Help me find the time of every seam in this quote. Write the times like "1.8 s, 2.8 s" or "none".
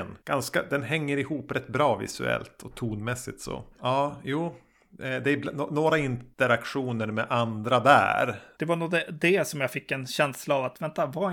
3.7 s, 8.5 s